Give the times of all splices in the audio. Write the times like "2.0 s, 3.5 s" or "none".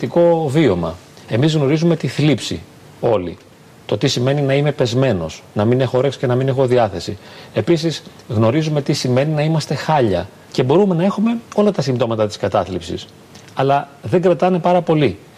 10.5 s